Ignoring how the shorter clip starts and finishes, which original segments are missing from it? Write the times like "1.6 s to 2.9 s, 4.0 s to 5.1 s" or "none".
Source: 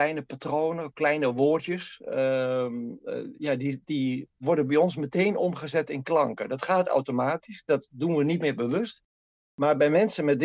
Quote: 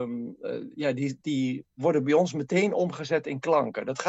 none

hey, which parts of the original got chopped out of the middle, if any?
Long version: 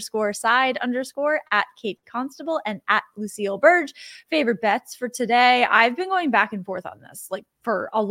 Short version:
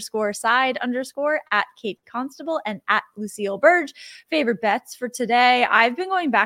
none

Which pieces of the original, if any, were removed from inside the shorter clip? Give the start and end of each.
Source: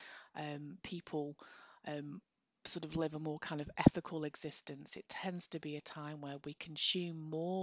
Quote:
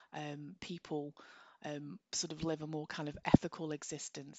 2.3 s to 2.6 s

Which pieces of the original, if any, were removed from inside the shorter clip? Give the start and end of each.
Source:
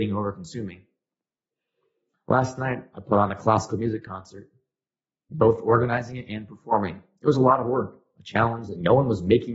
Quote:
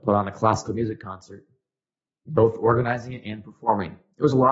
none

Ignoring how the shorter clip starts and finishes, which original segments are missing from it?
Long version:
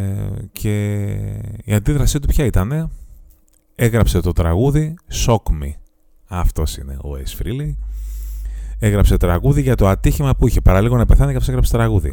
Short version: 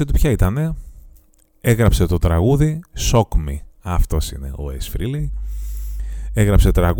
5.9 s to 6.2 s

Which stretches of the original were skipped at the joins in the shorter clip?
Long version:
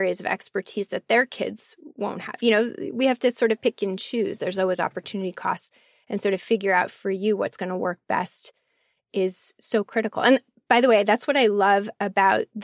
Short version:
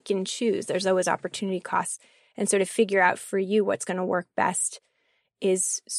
none

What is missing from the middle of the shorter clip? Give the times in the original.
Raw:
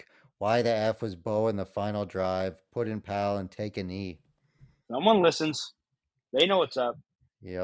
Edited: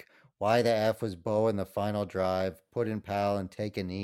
none

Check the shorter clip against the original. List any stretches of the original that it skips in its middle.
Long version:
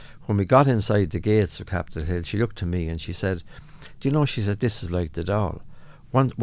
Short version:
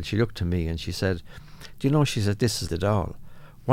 4.9 s to 5.1 s

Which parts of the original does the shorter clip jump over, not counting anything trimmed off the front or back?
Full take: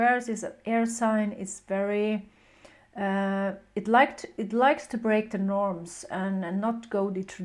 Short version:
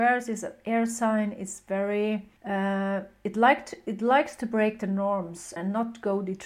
2.4 s to 2.9 s, 6.1 s to 6.4 s

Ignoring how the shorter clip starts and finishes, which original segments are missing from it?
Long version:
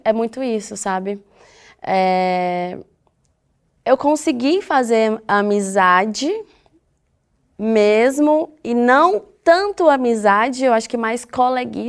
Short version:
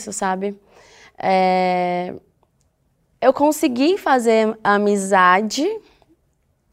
none

